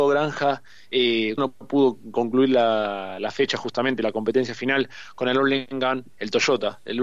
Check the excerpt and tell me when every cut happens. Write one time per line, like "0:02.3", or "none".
0:01.4